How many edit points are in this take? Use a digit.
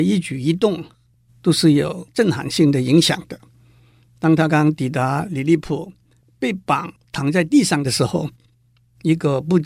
1